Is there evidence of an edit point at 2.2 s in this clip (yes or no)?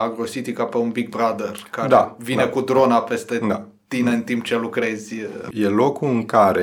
no